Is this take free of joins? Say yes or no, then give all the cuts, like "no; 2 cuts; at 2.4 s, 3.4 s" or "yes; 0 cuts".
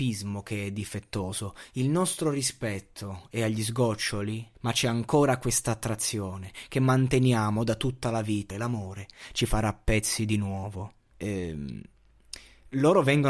no; 3 cuts; at 4.5 s, 8.5 s, 11.1 s